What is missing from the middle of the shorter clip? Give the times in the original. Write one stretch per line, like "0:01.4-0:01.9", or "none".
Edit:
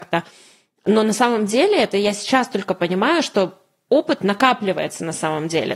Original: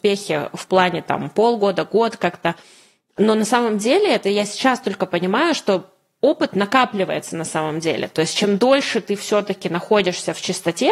none